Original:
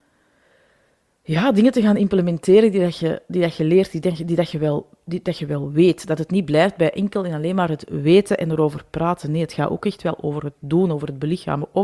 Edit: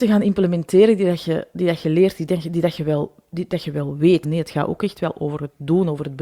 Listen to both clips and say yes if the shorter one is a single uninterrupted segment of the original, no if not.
no